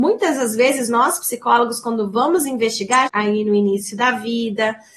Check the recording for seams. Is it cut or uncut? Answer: cut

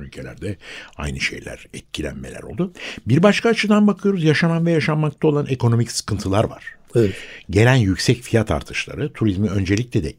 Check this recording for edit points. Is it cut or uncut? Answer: uncut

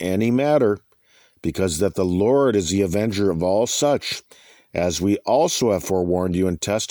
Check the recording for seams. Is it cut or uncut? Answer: uncut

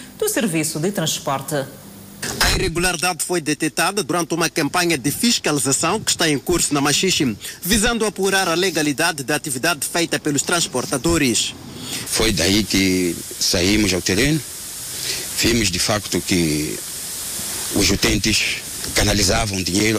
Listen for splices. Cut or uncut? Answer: cut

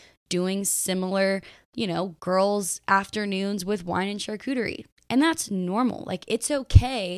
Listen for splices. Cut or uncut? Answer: uncut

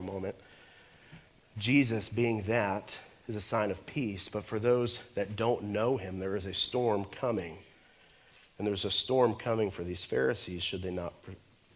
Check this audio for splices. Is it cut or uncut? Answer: uncut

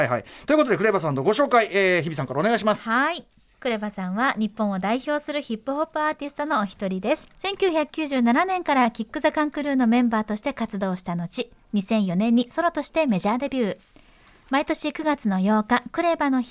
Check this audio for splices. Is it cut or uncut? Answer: cut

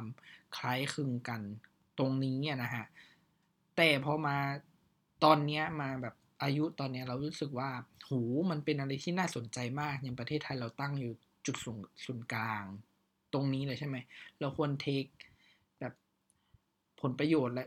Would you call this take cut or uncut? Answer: uncut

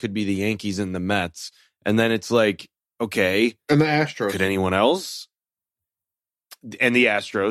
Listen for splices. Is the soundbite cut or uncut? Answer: uncut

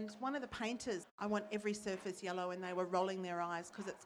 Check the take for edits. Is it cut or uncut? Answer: cut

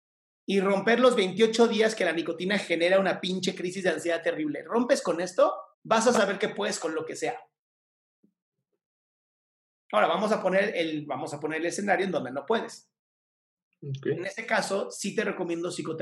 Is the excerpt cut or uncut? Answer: cut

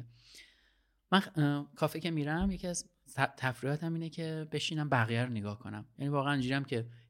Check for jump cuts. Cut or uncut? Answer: uncut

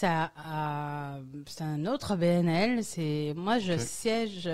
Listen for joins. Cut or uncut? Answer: uncut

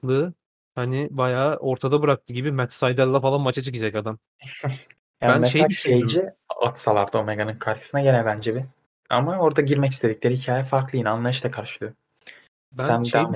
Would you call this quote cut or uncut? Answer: uncut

